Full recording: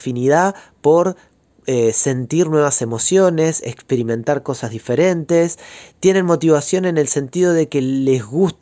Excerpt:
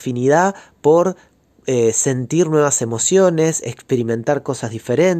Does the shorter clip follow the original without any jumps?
yes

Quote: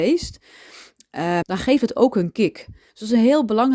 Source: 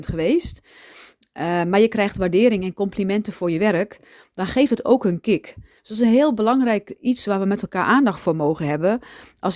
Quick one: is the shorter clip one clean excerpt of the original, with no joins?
no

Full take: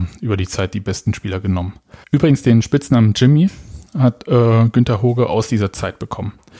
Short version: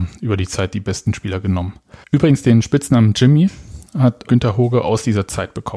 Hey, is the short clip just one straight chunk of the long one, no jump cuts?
no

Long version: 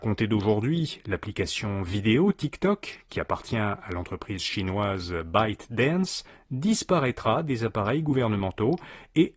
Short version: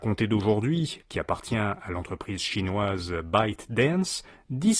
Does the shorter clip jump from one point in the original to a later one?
yes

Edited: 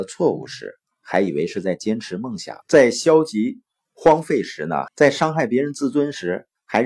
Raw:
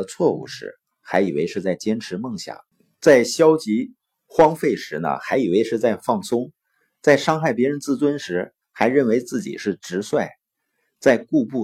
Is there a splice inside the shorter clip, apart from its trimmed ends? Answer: yes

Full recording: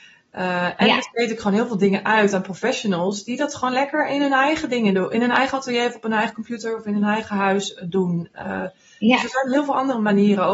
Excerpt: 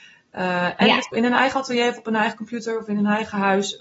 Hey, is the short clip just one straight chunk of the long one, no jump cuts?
no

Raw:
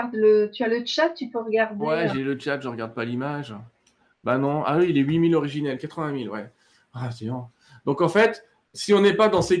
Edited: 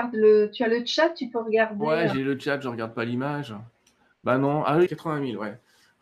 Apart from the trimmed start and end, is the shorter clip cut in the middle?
yes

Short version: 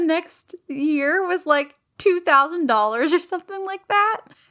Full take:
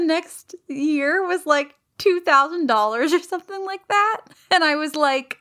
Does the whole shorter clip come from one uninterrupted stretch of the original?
yes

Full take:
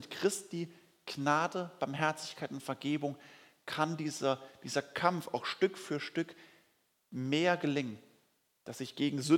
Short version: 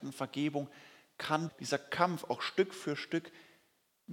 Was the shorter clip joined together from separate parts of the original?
yes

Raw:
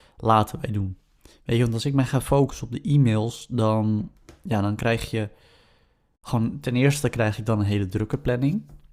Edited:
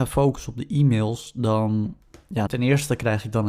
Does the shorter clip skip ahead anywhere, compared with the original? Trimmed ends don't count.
yes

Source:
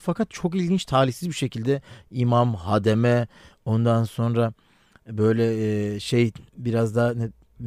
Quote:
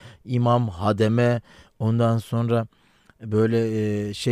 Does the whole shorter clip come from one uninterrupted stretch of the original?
yes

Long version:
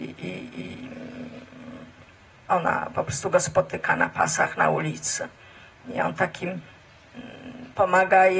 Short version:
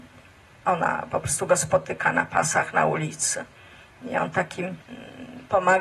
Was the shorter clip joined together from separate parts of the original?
yes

